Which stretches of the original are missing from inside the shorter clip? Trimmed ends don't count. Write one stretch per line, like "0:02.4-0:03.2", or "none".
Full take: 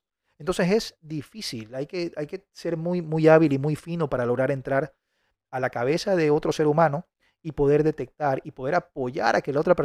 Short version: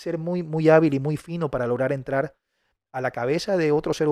none